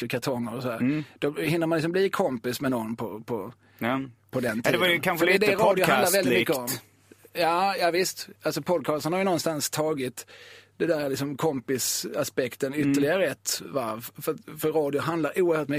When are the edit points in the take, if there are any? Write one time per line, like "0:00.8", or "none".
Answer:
none